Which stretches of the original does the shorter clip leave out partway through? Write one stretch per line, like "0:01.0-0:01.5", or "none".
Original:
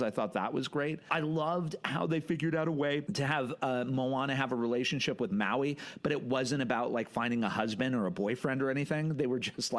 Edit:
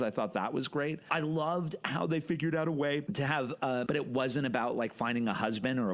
0:03.9-0:06.0